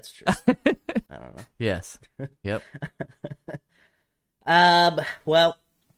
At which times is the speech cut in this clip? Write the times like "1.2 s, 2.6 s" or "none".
1.1 s